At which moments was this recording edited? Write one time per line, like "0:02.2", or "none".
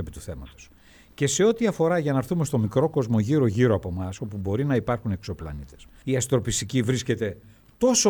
0:06.0